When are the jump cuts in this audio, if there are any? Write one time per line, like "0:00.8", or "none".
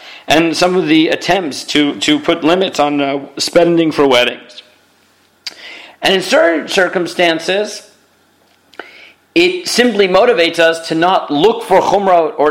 0:05.9